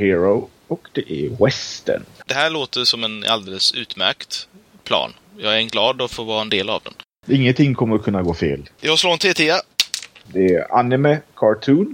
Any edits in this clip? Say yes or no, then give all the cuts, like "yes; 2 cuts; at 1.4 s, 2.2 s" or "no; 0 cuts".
yes; 3 cuts; at 2.3 s, 8.8 s, 10.3 s